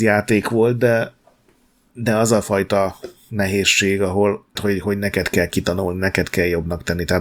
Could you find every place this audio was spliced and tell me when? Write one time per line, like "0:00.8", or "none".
0:04.6